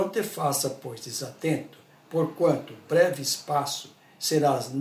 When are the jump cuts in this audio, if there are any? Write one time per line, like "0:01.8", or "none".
none